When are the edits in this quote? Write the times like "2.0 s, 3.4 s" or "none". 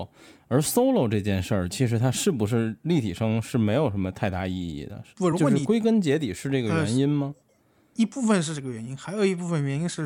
none